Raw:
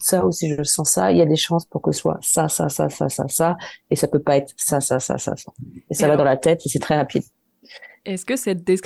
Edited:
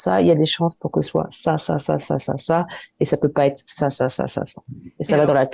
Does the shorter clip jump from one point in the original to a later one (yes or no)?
no